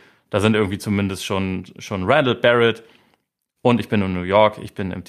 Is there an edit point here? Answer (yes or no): no